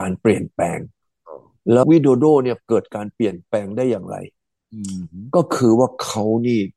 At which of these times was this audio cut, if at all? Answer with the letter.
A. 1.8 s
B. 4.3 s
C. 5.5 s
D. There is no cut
A